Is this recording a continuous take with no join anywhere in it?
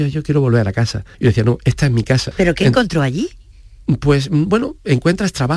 no; 2 cuts; at 1.1 s, 2.3 s

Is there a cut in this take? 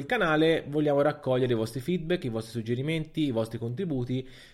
no; 0 cuts

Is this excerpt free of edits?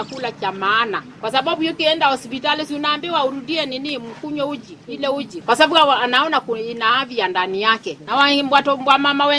no; 1 cut; at 5.4 s

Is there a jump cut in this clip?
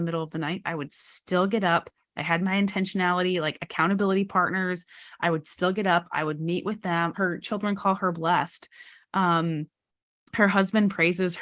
yes; 1 cut; at 7.1 s

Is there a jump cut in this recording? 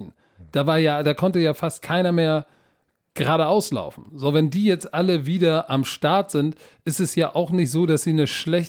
no; 0 cuts

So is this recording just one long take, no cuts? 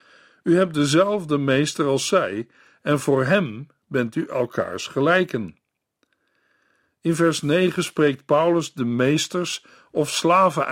yes; 0 cuts

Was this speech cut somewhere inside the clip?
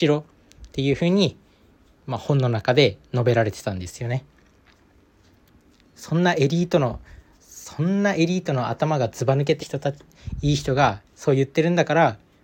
yes; 2 cuts; at 9.6 s, 11.1 s

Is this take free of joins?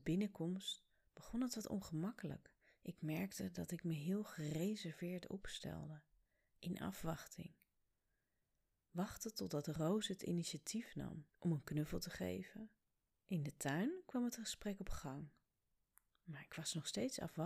no; 2 cuts; at 11.3 s, 13.1 s

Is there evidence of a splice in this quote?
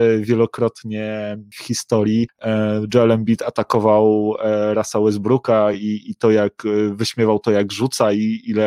no; 0 cuts

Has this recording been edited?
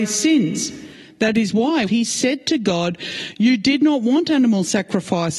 yes; 1 cut; at 1.9 s

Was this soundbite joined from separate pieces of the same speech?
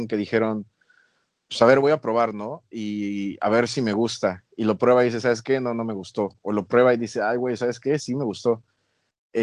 no; 0 cuts

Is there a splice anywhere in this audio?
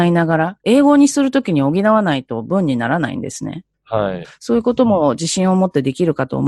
yes; 1 cut; at 4.2 s

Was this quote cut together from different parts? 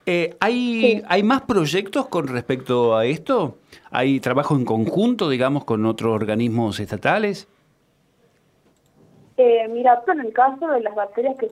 yes; 1 cut; at 10.1 s

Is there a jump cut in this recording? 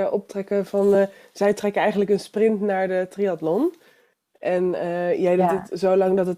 no; 0 cuts

